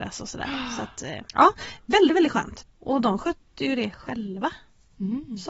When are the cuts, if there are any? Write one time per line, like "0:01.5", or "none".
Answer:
0:01.3
0:02.6